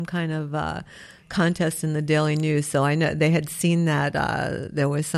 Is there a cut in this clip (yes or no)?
no